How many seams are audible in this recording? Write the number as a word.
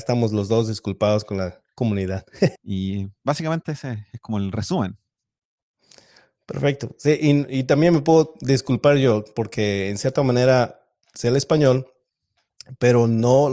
one